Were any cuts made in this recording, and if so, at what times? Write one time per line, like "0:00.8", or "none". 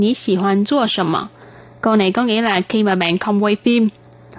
none